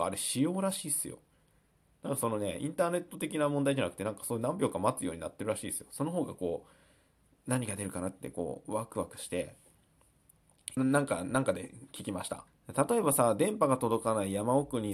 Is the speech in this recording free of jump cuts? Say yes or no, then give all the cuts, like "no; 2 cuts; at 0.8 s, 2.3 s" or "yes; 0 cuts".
no; 2 cuts; at 10.8 s, 12.5 s